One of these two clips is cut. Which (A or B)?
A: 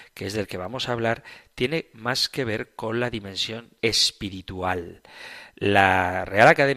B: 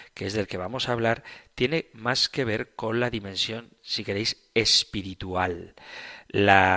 A